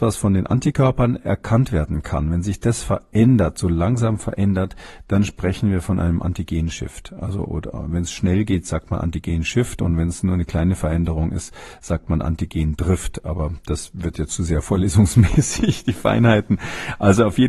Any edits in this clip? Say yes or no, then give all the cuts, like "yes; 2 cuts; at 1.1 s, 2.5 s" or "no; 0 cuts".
yes; 1 cut; at 14.3 s